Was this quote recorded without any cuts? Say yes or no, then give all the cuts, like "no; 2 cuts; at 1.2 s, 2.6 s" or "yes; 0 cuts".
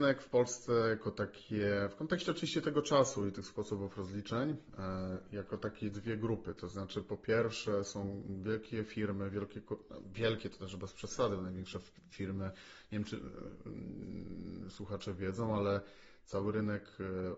yes; 0 cuts